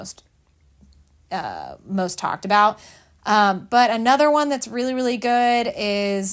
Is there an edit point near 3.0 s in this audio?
no; 0 cuts

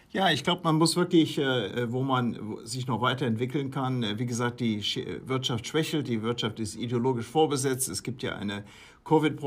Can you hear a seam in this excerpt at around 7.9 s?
no; 1 cut; at 1.7 s

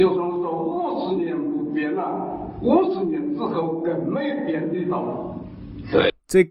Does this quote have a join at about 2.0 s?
no; 0 cuts

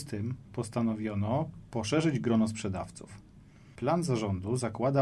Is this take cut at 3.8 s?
yes; 1 cut; at 3.8 s

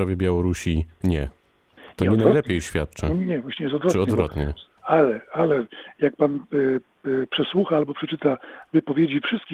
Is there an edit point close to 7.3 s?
no; 1 cut; at 4.8 s

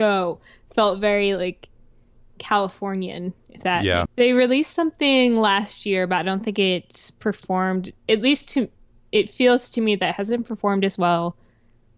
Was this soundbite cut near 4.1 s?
yes; 1 cut; at 4.1 s

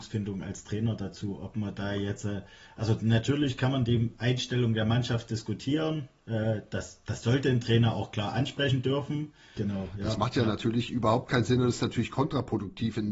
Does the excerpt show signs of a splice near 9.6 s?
yes; 1 cut; at 9.6 s

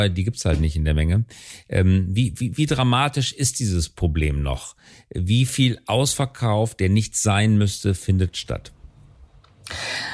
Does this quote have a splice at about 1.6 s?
no; 0 cuts

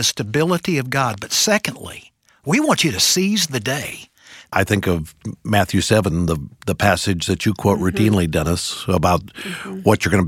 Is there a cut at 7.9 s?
no; 1 cut; at 4.5 s

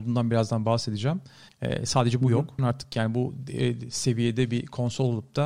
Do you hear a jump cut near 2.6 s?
yes; 2 cuts; at 1.5 s, 2.6 s

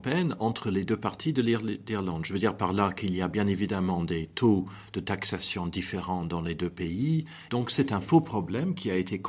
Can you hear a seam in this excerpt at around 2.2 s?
no; 1 cut; at 7.5 s

